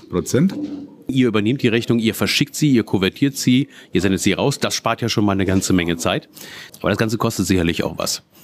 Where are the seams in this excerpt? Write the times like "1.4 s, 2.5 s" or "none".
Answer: 1.1 s, 6.7 s